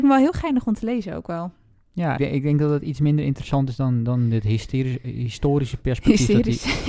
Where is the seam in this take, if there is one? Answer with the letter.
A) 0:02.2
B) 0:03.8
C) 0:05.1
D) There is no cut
A